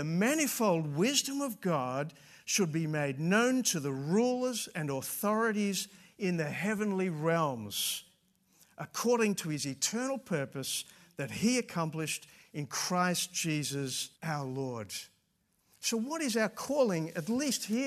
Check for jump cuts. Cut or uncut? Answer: cut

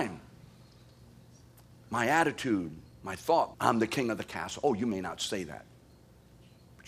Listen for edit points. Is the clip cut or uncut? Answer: cut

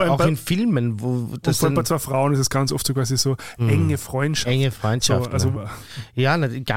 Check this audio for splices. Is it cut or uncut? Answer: cut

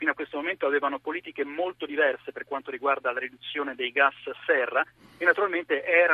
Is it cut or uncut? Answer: uncut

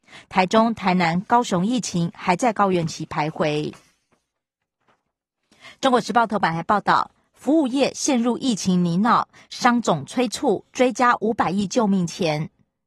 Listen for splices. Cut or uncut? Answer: uncut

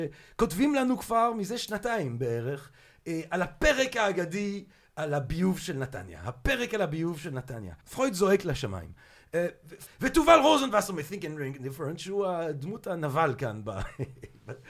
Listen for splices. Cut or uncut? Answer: cut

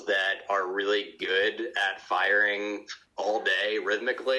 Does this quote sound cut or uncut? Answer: cut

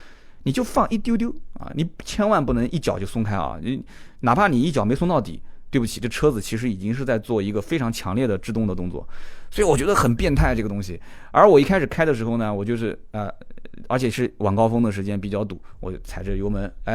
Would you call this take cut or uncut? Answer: uncut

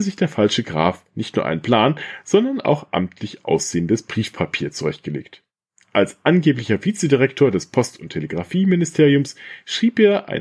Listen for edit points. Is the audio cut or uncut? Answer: uncut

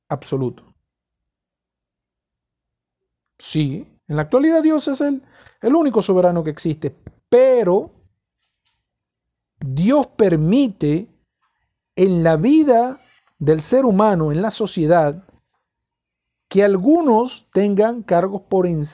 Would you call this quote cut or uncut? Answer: cut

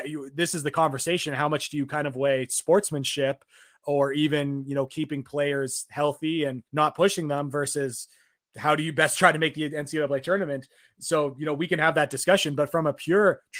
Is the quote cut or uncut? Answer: cut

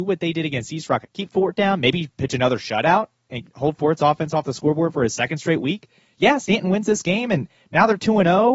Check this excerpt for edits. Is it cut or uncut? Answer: cut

